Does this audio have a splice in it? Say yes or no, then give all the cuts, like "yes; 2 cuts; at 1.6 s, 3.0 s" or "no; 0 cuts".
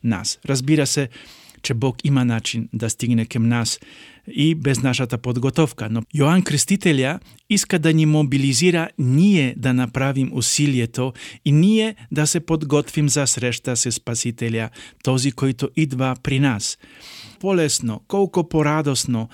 yes; 1 cut; at 17.4 s